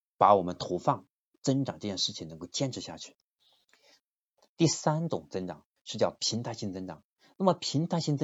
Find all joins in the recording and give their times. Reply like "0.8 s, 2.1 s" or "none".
none

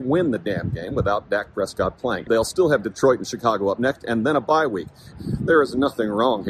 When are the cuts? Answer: 2.3 s, 5.1 s

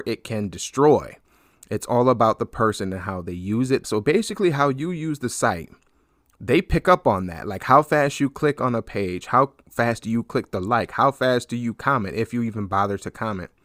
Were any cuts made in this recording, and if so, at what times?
3.8 s

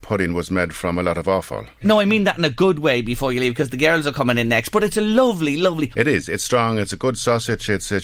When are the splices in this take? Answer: 1.8 s, 5.9 s

